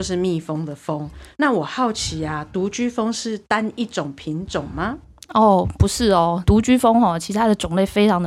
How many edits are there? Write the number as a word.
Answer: zero